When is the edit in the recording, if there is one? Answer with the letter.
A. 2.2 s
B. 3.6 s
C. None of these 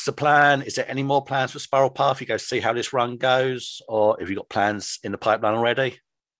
C